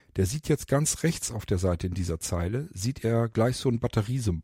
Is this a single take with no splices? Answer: yes; 0 cuts

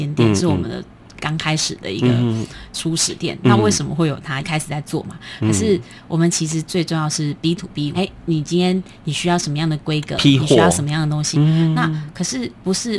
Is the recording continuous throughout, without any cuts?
no; 3 cuts; at 4.4 s, 7.9 s, 11.3 s

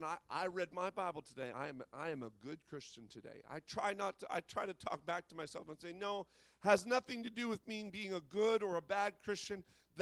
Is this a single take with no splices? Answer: yes; 0 cuts

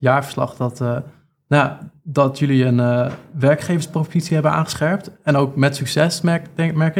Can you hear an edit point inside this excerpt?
no; 0 cuts

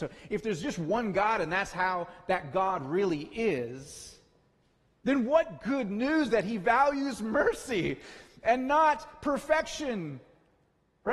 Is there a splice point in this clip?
no; 0 cuts

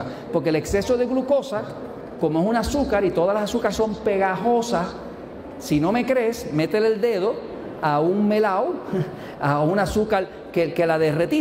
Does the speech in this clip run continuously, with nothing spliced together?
yes; 0 cuts

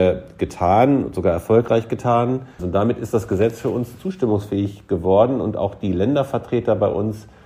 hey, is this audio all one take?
no; 1 cut; at 2.6 s

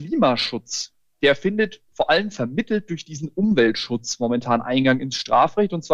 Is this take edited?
no; 0 cuts

